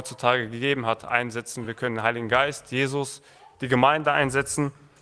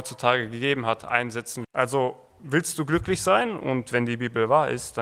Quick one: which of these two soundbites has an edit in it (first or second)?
second